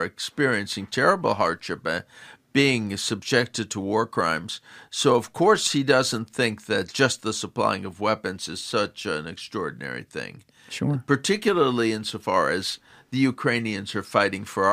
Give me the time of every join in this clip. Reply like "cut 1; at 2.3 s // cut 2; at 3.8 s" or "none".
none